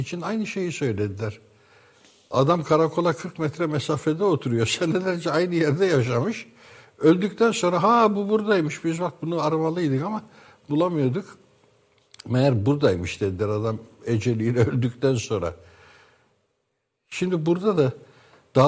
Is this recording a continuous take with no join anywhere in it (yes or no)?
yes